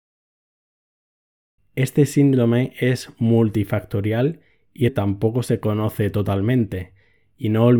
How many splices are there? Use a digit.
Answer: 2